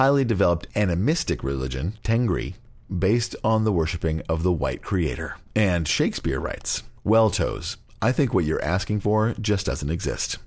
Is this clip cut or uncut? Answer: uncut